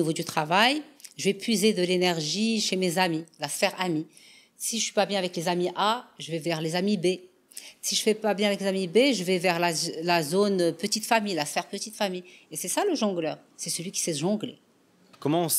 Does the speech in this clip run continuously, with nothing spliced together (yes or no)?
yes